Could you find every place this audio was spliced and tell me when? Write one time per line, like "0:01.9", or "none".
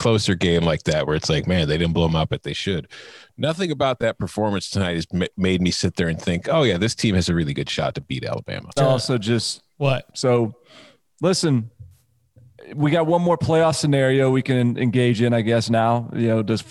0:08.8
0:10.1